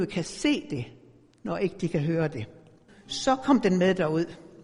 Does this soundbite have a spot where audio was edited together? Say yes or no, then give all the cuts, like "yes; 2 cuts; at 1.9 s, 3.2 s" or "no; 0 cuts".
yes; 1 cut; at 2.9 s